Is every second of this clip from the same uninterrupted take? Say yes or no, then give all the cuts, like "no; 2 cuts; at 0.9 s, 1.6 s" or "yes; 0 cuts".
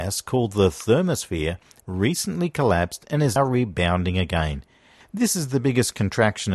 no; 1 cut; at 3.4 s